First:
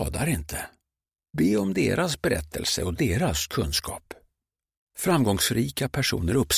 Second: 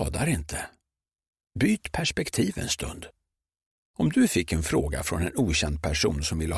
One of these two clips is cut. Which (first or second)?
first